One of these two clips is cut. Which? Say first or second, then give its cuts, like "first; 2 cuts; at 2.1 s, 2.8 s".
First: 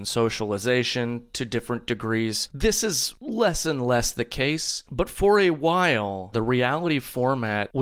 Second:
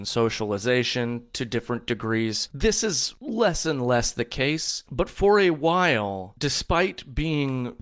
first; 1 cut; at 6.3 s